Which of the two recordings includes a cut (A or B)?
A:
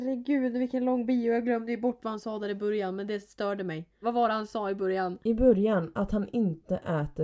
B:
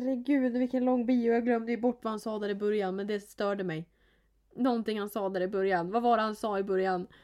A